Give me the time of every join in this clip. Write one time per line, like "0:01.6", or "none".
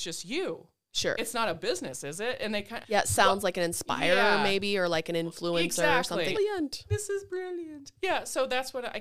0:02.8
0:06.3